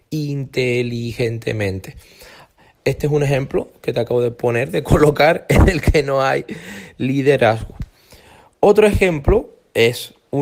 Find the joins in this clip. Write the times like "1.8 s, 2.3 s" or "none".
2.8 s